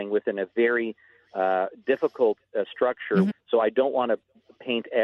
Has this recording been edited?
yes; 1 cut; at 3.3 s

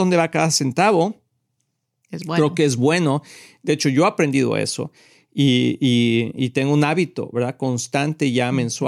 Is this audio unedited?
yes; 0 cuts

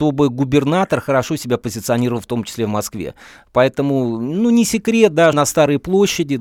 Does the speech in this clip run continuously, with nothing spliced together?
no; 1 cut; at 5.3 s

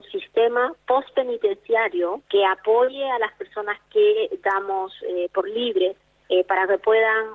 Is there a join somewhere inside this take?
yes; 2 cuts; at 2.3 s, 6.2 s

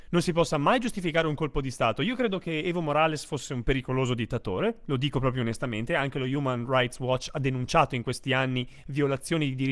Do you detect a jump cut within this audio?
no; 0 cuts

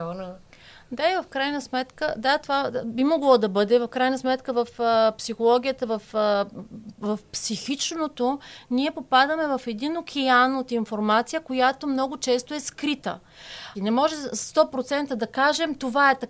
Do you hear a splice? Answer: yes; 1 cut; at 13.7 s

